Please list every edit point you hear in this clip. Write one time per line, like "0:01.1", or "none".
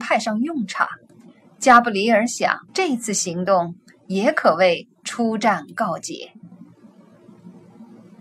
0:01.5
0:02.7